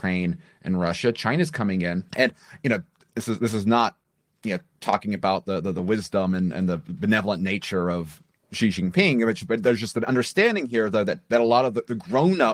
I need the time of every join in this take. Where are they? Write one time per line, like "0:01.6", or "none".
0:02.1